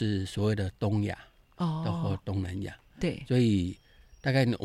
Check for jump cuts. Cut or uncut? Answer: uncut